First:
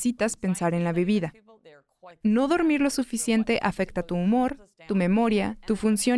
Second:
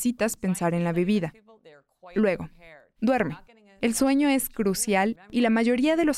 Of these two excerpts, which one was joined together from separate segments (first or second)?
first